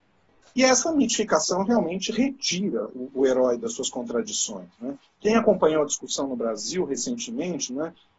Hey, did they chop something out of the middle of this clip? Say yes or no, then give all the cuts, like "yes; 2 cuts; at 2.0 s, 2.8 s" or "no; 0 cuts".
no; 0 cuts